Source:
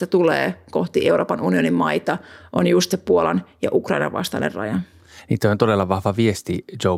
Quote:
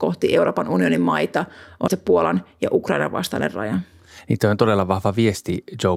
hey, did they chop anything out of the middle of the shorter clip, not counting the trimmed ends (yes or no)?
yes